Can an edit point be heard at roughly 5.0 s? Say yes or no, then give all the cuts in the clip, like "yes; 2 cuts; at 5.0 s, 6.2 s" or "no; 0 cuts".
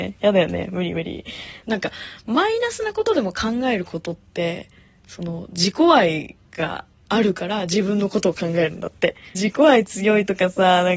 no; 2 cuts; at 1.6 s, 9.3 s